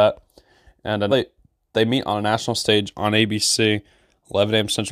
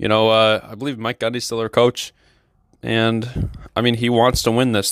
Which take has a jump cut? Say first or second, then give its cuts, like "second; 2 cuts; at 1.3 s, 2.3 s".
first; 1 cut; at 1.1 s